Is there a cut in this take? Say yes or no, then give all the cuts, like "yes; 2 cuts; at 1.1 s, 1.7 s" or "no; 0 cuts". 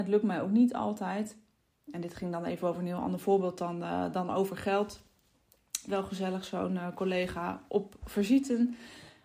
yes; 1 cut; at 5.9 s